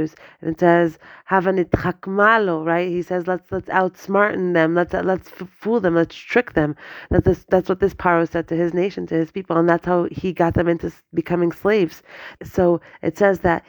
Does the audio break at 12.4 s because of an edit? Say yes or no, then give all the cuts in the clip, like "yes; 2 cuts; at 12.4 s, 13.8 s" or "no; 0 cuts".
yes; 1 cut; at 12.4 s